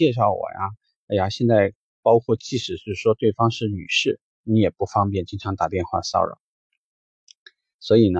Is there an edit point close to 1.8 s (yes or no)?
yes